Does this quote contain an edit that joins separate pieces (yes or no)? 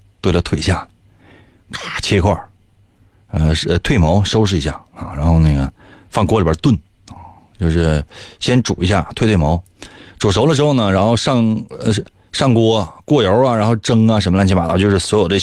no